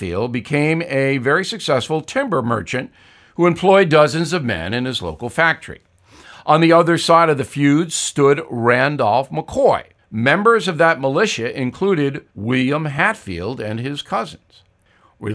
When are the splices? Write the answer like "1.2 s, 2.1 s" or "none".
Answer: 10.0 s, 12.3 s